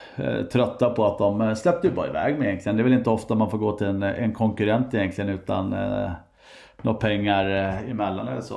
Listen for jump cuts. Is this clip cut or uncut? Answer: uncut